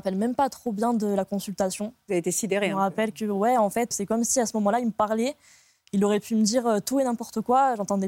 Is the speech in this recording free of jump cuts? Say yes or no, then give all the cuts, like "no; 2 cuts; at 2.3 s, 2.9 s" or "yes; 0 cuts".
no; 1 cut; at 3.9 s